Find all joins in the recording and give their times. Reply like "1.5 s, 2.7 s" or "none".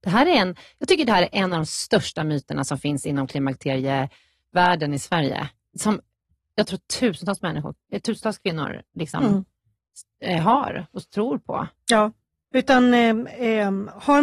none